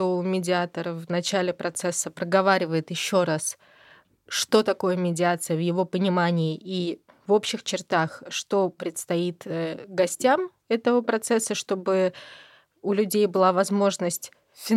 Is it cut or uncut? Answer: uncut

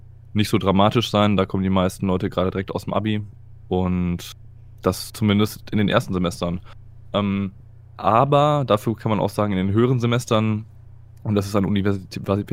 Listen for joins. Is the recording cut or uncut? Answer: uncut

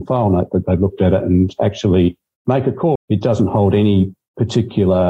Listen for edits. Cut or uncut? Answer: cut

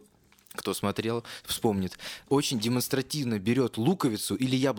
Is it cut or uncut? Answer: uncut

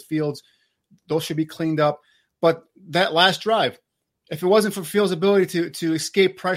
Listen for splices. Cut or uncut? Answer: uncut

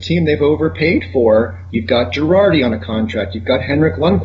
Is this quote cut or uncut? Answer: cut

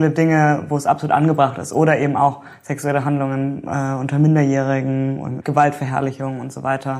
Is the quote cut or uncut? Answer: uncut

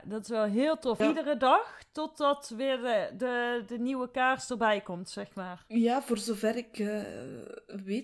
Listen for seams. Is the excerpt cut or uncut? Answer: cut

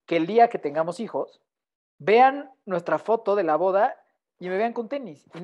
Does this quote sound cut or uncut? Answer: uncut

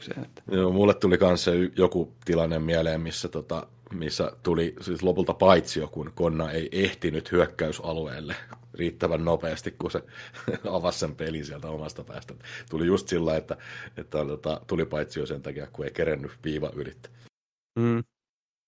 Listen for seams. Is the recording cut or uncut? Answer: uncut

